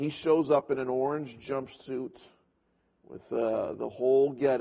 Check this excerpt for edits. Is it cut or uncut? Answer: uncut